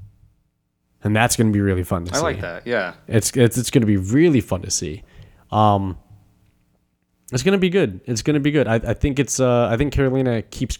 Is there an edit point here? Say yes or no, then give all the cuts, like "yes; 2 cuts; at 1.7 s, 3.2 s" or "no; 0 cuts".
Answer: no; 0 cuts